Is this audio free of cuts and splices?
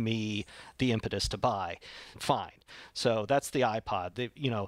no; 1 cut; at 2.1 s

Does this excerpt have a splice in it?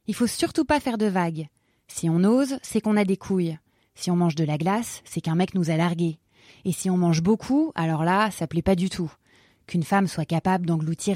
no; 0 cuts

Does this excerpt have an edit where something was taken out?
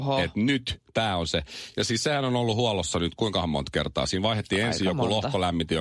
no; 0 cuts

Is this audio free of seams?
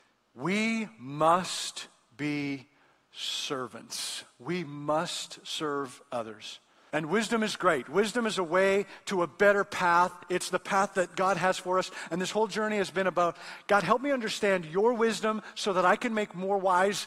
no; 1 cut; at 6.9 s

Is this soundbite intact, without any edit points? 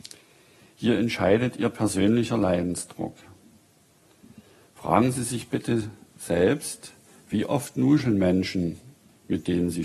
yes; 0 cuts

